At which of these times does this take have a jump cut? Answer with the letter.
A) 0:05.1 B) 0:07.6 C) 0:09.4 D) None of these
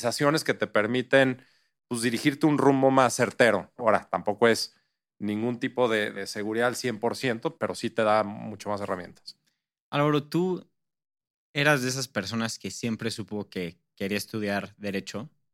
B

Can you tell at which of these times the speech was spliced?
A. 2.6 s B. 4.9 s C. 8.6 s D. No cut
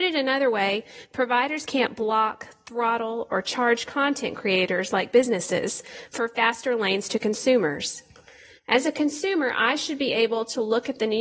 D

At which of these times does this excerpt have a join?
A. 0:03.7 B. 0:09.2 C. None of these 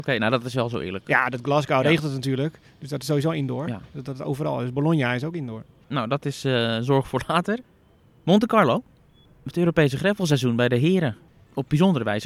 C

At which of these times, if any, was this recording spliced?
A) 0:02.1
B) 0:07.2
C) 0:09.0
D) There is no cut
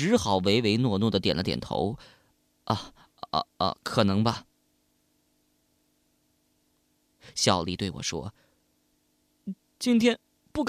B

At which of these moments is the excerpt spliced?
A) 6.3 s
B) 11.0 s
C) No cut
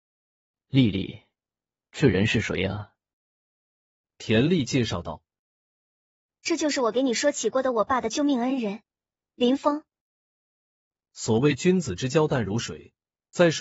B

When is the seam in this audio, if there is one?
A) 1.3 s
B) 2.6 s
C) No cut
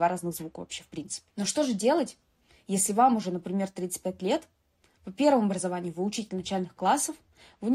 A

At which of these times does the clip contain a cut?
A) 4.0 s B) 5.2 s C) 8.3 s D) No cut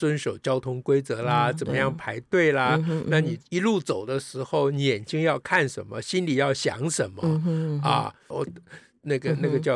C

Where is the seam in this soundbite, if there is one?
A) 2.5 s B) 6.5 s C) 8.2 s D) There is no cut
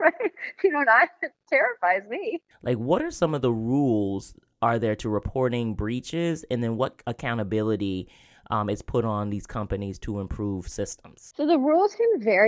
A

